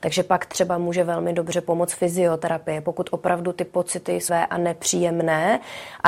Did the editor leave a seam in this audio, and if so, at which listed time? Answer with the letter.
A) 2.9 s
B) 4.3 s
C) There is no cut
B